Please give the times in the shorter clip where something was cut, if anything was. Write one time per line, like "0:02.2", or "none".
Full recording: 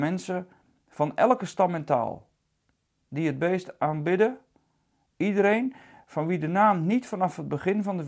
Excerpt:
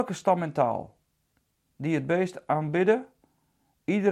none